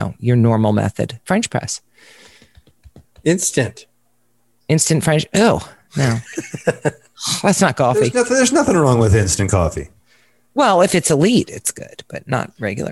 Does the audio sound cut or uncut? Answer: cut